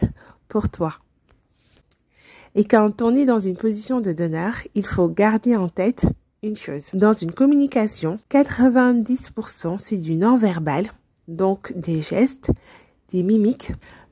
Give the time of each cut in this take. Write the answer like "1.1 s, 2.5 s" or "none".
none